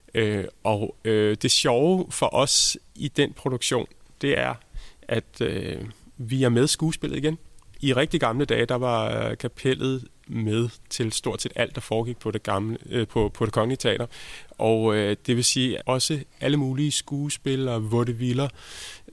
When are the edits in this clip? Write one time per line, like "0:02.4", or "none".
0:13.1
0:15.8